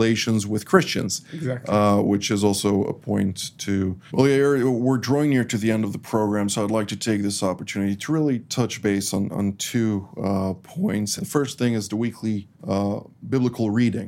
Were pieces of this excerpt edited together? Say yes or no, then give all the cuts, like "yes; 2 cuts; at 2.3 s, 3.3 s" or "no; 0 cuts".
yes; 3 cuts; at 4.1 s, 11.2 s, 12.5 s